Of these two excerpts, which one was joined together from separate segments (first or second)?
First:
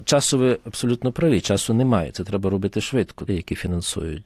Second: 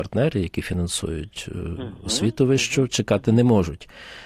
first